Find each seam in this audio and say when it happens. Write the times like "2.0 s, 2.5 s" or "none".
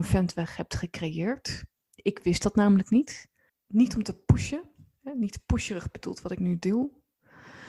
3.5 s